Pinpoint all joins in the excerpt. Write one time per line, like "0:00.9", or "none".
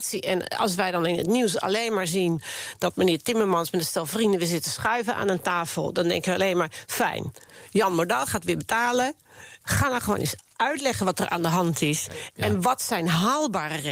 0:09.6